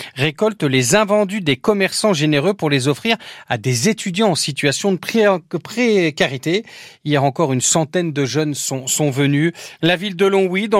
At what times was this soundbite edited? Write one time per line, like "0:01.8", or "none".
0:09.8